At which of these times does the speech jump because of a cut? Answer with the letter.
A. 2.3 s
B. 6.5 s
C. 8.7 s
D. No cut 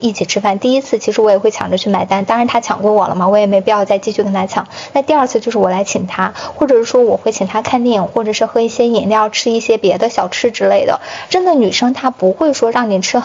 D